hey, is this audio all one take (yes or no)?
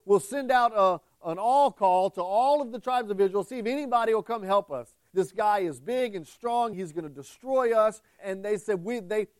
no